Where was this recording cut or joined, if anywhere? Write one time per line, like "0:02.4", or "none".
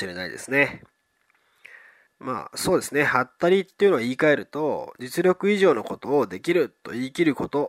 0:02.1